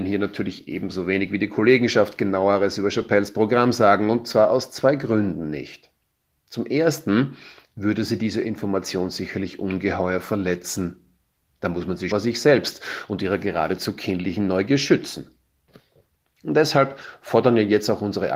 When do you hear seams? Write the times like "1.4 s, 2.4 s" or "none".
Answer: 12.1 s